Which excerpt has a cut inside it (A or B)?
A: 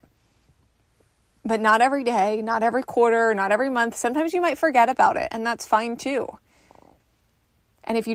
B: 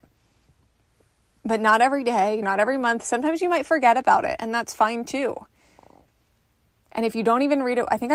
B